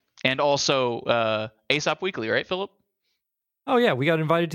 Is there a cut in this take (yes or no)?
no